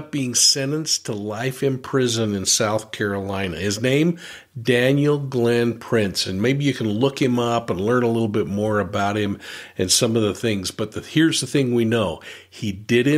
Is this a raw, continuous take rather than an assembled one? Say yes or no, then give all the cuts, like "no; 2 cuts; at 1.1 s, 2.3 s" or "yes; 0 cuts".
yes; 0 cuts